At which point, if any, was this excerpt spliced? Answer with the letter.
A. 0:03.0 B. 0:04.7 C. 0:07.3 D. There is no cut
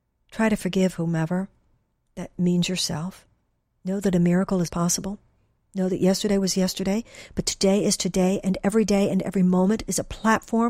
B